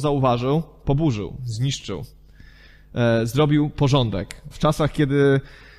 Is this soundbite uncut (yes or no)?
no